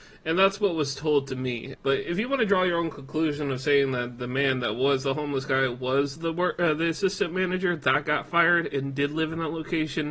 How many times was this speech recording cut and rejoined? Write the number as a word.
one